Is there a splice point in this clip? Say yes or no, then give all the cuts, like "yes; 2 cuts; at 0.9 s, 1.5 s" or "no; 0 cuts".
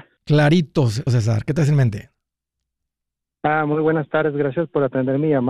yes; 1 cut; at 1.1 s